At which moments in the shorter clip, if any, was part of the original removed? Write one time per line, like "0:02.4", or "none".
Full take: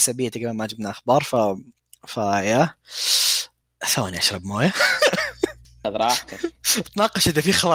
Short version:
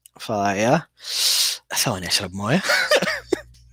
0:01.7